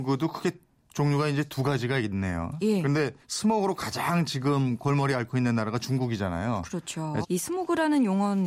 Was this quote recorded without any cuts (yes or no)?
no